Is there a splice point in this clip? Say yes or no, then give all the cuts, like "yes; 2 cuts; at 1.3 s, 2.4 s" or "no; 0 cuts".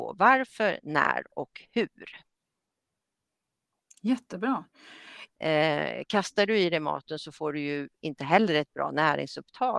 yes; 1 cut; at 5.3 s